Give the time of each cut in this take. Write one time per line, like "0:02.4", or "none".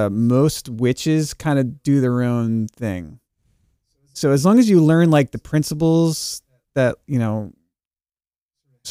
none